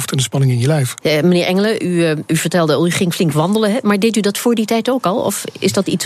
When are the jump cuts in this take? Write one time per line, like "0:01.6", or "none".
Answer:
0:01.0